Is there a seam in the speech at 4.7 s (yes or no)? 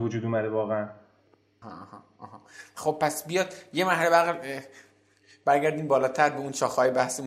no